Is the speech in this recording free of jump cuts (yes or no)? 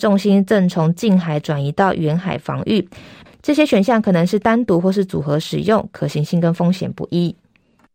no